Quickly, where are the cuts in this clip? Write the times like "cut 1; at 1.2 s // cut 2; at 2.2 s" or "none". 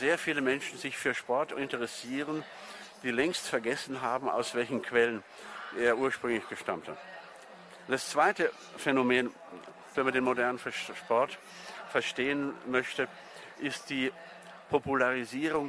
cut 1; at 9.9 s